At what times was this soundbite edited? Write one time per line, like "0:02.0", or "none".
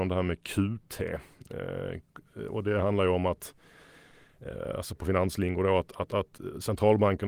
none